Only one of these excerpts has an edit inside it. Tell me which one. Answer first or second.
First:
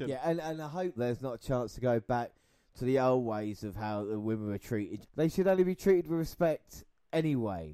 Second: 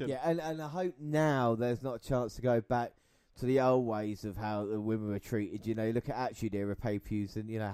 first